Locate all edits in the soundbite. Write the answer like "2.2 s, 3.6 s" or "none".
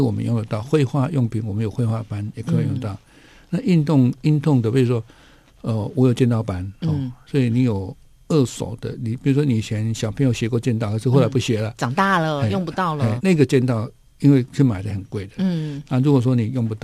13.2 s